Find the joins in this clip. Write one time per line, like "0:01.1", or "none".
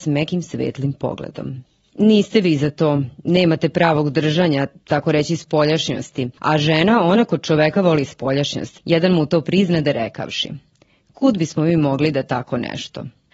0:01.9
0:08.8